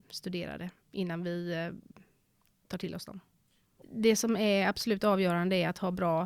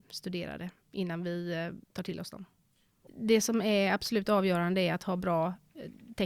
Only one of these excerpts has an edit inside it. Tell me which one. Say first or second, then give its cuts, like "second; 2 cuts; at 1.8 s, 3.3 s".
second; 1 cut; at 1.8 s